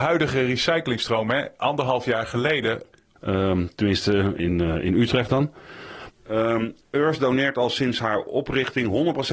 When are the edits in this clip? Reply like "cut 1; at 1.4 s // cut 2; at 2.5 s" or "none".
cut 1; at 3.2 s // cut 2; at 4.4 s // cut 3; at 6.1 s